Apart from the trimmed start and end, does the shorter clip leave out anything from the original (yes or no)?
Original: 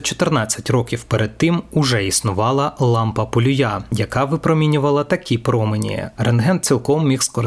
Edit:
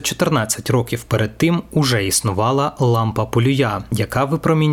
no